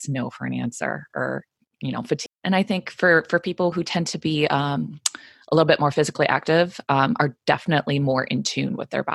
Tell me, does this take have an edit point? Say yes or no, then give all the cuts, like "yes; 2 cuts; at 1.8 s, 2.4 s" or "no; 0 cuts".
yes; 2 cuts; at 2.3 s, 3.7 s